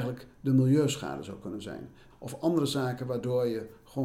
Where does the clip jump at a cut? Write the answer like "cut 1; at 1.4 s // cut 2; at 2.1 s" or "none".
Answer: cut 1; at 2.1 s